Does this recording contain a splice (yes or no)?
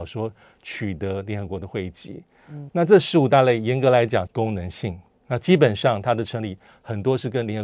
yes